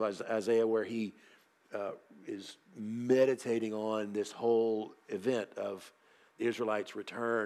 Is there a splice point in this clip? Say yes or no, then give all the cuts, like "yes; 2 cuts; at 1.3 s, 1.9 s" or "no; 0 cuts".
no; 0 cuts